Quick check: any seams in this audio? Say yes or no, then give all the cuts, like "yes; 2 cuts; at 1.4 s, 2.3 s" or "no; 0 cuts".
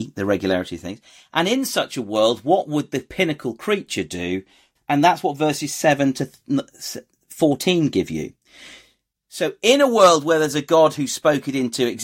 yes; 1 cut; at 4.8 s